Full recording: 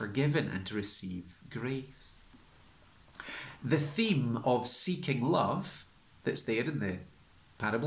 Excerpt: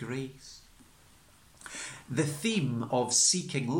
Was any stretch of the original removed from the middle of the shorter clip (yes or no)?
no